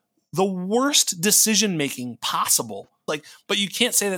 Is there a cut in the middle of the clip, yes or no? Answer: yes